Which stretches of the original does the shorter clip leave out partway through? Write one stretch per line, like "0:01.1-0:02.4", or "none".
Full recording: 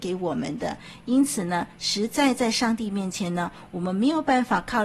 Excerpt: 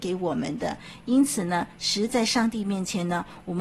0:02.1-0:02.4